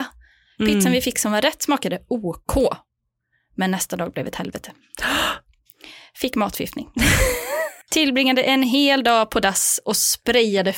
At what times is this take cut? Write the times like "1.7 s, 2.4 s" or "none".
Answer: 7.8 s